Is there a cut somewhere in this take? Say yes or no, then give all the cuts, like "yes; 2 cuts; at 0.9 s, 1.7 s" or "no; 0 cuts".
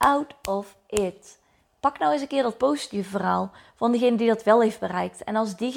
no; 0 cuts